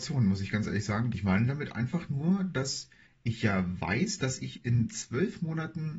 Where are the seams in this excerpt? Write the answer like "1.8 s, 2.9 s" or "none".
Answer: 1.1 s